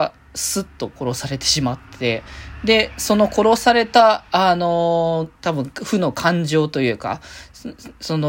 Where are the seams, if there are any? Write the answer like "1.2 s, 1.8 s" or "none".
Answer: 5.4 s